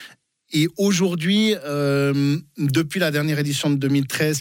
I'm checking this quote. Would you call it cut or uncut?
uncut